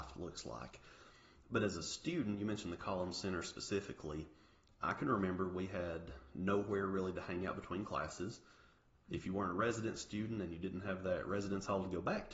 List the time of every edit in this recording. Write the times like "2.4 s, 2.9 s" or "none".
9.0 s